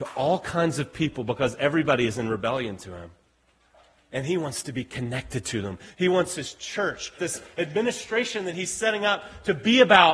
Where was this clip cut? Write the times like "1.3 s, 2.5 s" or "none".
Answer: 7.2 s

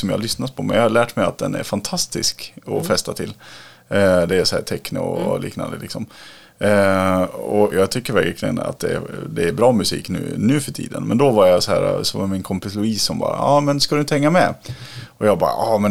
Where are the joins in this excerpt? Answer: 7.7 s

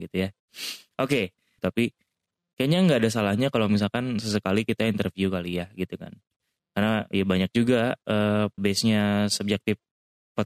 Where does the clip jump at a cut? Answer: 1.6 s, 8.6 s

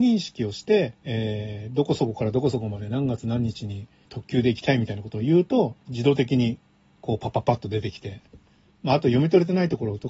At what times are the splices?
1.0 s, 5.8 s

